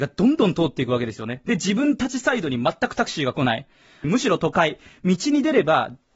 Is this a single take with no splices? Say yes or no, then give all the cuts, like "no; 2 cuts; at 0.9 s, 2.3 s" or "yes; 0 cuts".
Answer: no; 1 cut; at 4.0 s